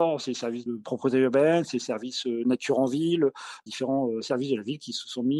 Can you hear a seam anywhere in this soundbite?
no; 0 cuts

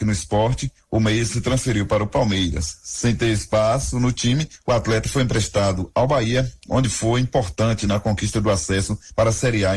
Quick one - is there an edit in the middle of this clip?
no; 0 cuts

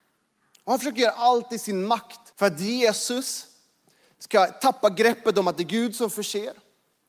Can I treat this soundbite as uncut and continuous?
no; 1 cut; at 2.3 s

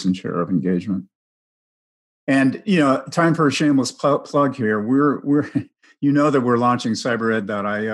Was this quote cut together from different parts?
no; 0 cuts

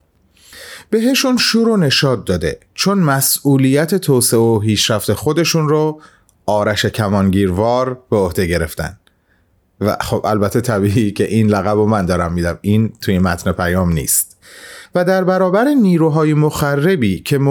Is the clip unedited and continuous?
yes; 0 cuts

